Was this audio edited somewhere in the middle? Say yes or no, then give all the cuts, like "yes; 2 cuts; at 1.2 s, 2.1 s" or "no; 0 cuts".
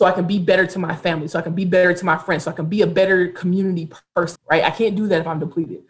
yes; 1 cut; at 4.3 s